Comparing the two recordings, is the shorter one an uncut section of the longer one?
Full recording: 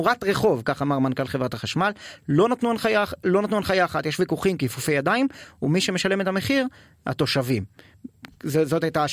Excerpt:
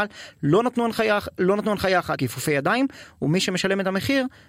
no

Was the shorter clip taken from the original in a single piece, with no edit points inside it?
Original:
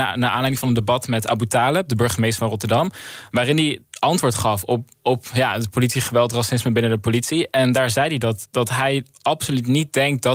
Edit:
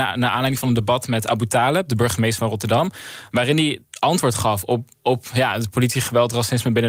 yes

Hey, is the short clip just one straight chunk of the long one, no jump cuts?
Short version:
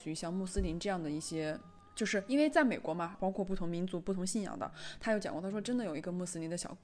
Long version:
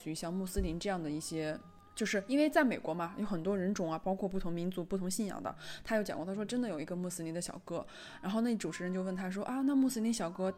no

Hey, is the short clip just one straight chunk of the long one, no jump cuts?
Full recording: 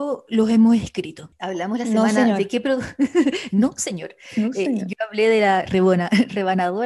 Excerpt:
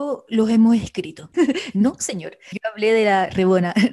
no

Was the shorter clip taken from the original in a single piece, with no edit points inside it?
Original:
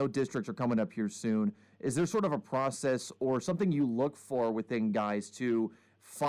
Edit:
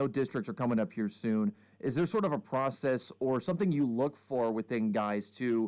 yes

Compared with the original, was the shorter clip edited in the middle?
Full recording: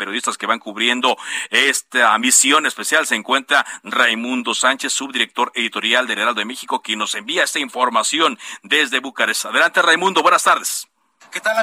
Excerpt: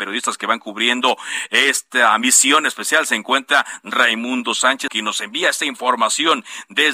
yes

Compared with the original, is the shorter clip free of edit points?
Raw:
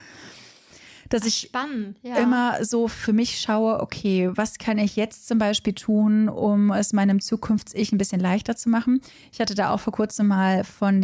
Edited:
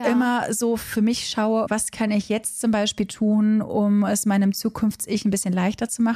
no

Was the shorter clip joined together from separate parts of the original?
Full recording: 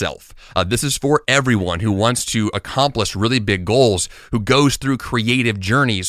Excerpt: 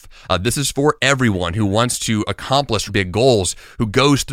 yes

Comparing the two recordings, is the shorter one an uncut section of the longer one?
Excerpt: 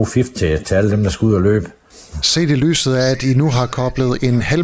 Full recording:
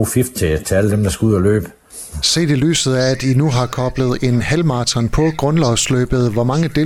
yes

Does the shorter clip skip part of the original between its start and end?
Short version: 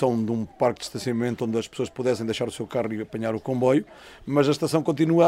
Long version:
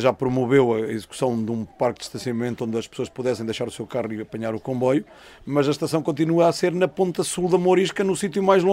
no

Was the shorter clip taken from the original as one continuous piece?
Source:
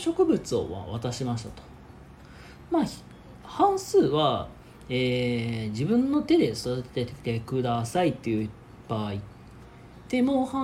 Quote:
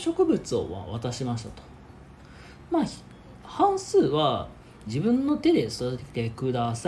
no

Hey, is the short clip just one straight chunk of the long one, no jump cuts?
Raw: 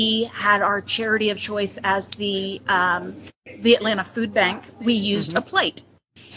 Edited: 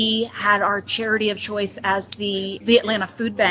no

